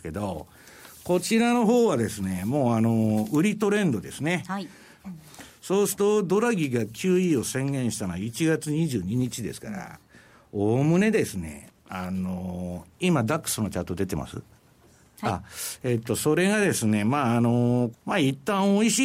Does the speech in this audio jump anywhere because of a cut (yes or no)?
yes